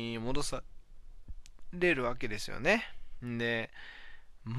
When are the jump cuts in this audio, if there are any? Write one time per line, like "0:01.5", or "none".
0:03.2